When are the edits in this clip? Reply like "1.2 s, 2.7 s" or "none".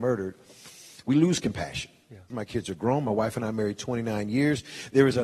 2.3 s